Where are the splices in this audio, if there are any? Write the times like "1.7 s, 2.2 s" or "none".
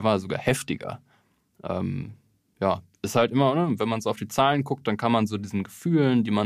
none